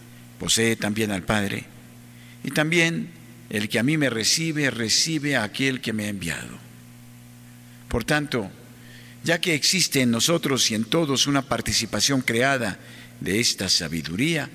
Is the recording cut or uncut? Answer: uncut